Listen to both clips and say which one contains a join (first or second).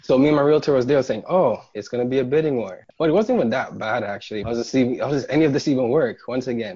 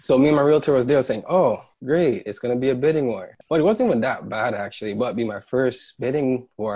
first